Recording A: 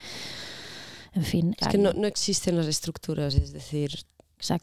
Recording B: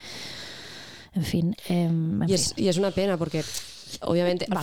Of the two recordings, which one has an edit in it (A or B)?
A